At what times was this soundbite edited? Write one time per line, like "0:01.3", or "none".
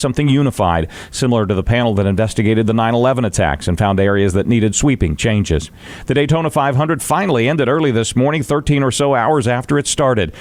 none